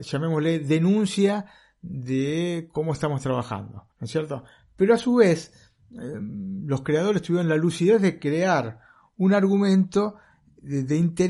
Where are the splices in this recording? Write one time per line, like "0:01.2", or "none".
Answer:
0:03.9